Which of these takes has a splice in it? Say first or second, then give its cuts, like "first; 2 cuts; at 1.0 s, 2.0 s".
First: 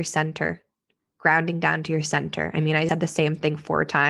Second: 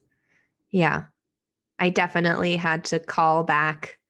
first; 1 cut; at 2.9 s